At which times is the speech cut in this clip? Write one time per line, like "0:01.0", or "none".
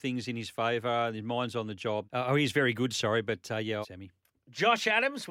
0:02.0
0:03.8